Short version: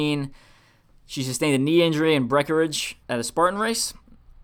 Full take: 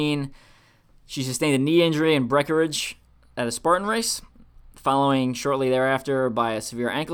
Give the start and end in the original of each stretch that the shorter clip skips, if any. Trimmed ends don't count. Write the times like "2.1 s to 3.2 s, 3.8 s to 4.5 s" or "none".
3.0 s to 3.3 s